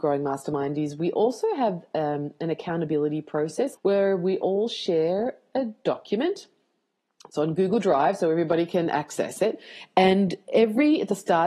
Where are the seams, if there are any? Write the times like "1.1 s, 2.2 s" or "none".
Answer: 3.7 s

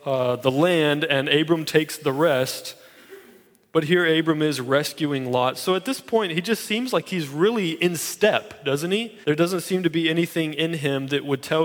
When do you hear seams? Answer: 9.2 s

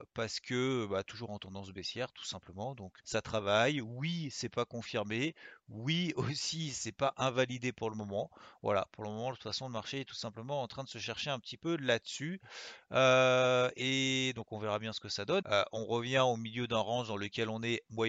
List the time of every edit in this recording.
3.0 s, 15.4 s

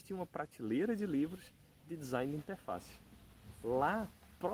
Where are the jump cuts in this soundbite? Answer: none

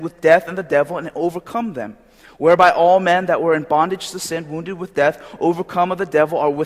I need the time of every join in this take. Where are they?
none

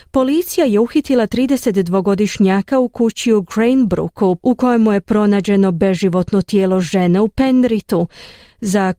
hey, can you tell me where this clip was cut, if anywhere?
4.4 s

